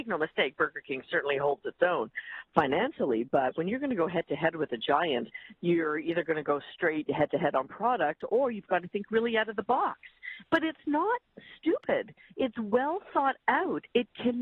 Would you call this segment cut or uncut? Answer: cut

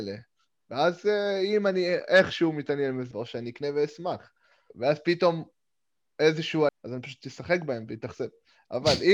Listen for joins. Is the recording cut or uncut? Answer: cut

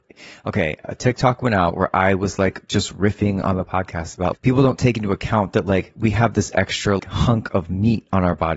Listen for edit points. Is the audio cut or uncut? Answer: cut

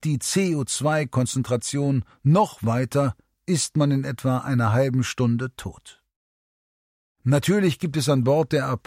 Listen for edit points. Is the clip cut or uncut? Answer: uncut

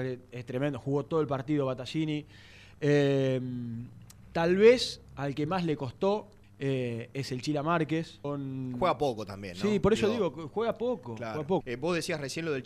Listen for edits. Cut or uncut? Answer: cut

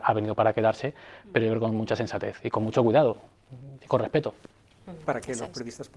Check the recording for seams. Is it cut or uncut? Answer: cut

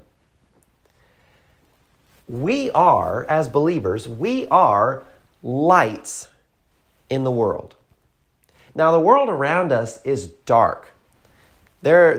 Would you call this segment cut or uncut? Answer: uncut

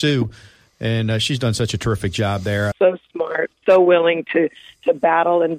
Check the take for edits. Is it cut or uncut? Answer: cut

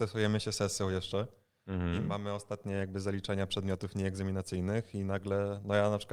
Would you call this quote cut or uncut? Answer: uncut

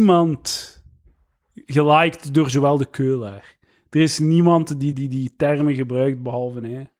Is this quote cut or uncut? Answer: cut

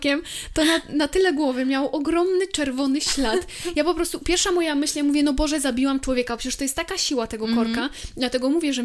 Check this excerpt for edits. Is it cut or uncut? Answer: uncut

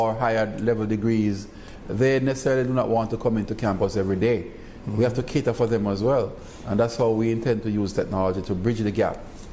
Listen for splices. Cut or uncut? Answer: uncut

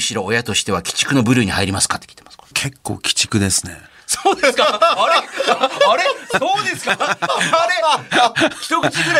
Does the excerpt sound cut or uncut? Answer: uncut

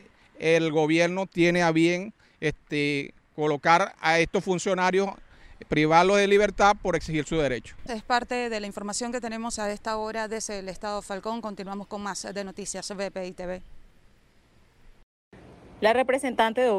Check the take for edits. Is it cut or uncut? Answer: cut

